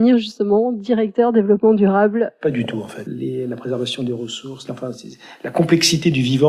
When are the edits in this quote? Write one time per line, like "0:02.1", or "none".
0:03.1
0:04.7